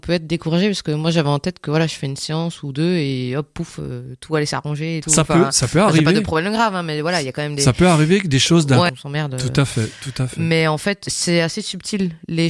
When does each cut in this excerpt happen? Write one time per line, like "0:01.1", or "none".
0:08.9